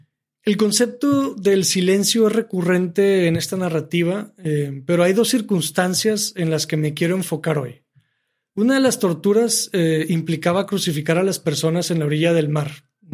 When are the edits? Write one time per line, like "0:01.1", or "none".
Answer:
0:08.5